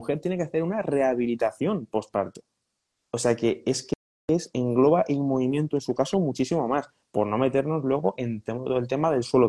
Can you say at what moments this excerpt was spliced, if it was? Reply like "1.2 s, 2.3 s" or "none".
2.9 s